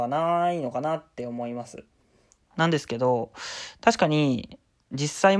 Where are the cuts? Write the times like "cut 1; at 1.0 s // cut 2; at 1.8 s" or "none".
cut 1; at 2.4 s